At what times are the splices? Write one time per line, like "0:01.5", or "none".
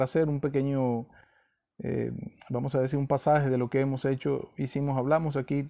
none

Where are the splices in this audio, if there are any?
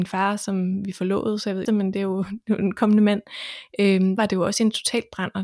0:01.6
0:04.2

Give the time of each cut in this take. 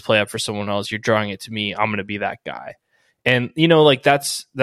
none

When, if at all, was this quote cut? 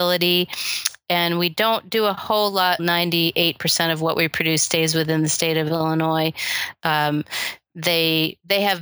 0:02.8
0:06.8

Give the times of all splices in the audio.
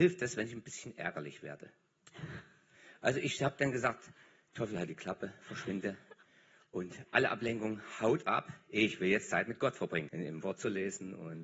0:10.1

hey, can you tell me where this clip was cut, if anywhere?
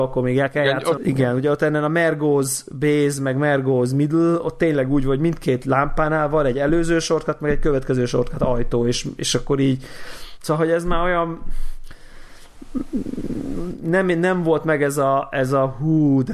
0:01.0

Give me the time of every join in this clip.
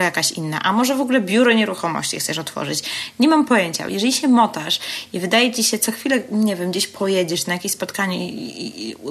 none

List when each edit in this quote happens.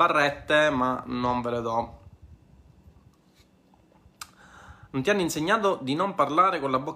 none

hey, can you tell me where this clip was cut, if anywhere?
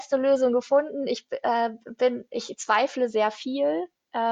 none

